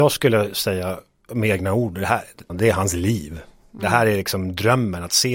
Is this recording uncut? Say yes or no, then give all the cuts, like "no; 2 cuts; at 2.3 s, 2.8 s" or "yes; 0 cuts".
no; 1 cut; at 2.5 s